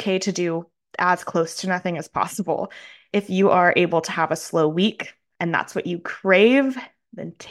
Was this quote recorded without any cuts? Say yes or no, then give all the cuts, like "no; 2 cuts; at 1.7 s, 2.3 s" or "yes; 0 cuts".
yes; 0 cuts